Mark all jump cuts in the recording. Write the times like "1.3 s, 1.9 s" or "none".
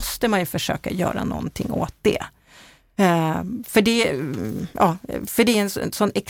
none